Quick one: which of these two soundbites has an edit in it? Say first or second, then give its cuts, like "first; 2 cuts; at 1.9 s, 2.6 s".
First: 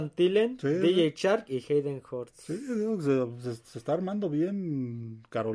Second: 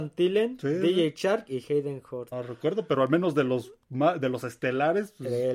second; 1 cut; at 2.3 s